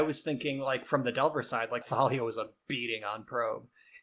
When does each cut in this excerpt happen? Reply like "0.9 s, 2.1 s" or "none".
1.8 s

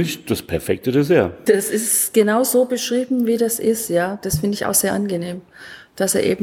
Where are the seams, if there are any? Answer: 1.5 s

